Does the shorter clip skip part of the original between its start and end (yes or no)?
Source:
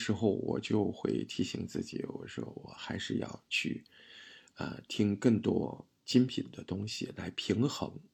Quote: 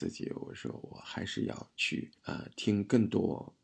yes